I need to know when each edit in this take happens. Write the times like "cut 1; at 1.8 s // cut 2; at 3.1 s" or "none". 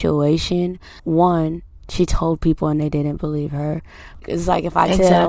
cut 1; at 1.0 s // cut 2; at 4.2 s